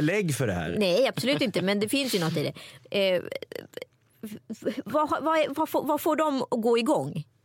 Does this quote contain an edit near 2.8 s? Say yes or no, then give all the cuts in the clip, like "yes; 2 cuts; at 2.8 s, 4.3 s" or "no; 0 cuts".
yes; 1 cut; at 2.8 s